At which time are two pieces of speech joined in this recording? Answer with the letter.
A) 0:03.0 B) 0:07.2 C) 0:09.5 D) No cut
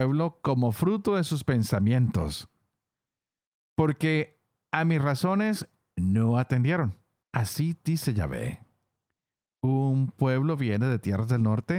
B